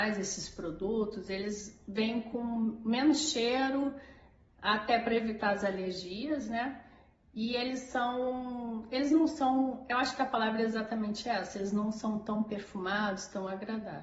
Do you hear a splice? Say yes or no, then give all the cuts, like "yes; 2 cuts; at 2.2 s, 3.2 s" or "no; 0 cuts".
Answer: no; 0 cuts